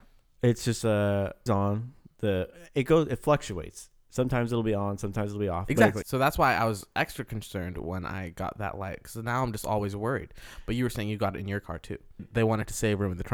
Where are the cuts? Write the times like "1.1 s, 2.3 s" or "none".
1.5 s, 6.0 s, 12.2 s